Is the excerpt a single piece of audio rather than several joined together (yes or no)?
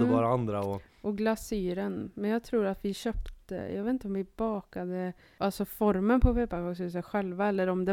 yes